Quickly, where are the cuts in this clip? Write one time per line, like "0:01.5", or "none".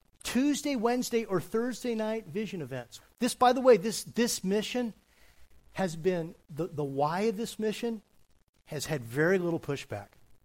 0:03.0
0:06.4